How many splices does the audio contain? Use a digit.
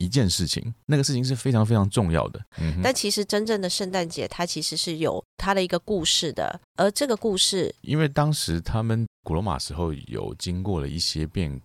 3